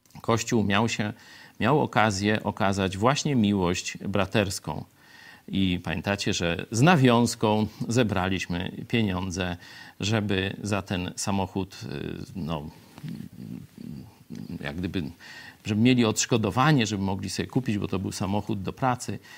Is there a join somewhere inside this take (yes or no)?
no